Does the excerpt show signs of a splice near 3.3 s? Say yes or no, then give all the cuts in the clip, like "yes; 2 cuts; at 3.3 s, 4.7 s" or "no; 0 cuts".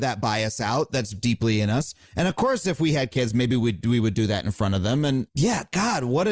no; 1 cut; at 5.3 s